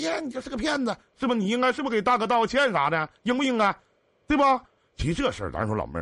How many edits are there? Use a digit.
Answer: 1